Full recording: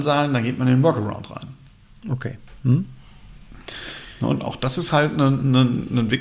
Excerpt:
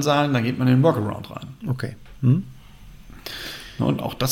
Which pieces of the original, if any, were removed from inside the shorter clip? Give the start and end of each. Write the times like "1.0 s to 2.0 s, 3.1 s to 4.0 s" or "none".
1.6 s to 2.0 s